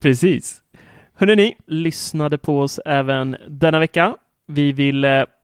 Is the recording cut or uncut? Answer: cut